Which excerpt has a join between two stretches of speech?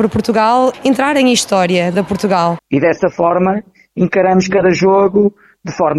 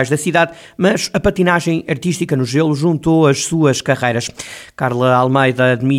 first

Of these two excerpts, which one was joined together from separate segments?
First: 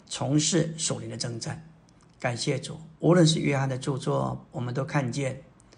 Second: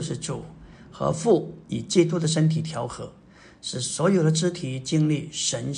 first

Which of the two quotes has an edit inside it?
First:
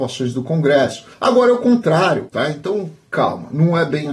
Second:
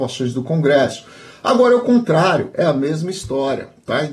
first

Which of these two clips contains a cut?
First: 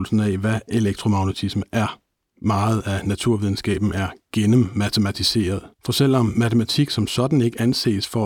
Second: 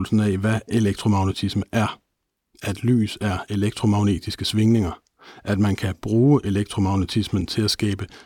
first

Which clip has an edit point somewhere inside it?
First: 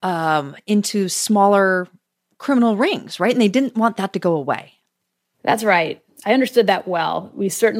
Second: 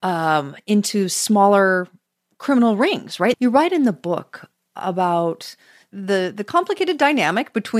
second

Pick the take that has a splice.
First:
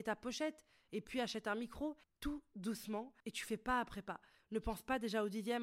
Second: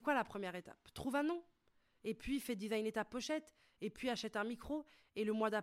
first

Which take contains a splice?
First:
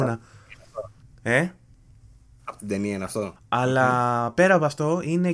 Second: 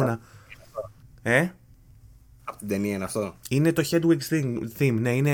first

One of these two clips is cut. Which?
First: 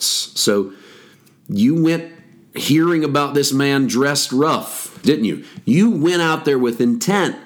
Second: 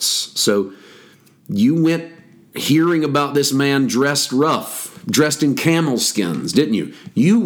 first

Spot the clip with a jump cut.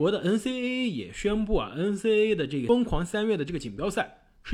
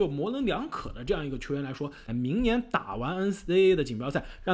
second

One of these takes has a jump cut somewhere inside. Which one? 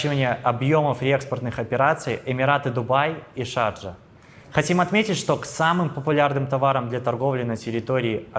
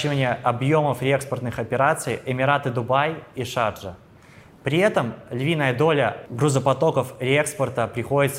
first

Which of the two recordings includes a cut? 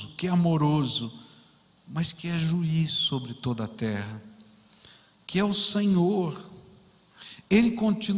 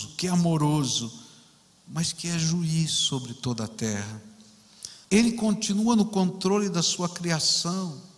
second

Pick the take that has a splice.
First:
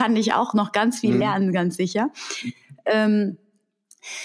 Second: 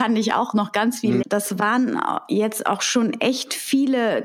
second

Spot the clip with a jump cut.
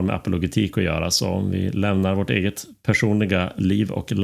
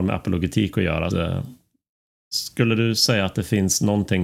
second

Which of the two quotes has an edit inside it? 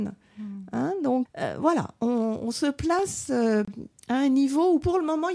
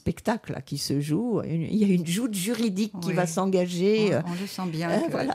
first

